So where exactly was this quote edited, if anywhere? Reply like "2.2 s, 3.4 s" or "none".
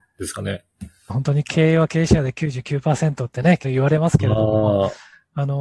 1.1 s, 3.6 s